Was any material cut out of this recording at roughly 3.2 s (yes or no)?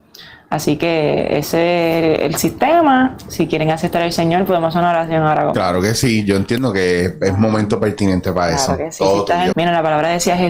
no